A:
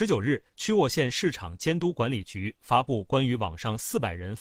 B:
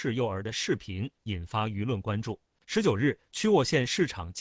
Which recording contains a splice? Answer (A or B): B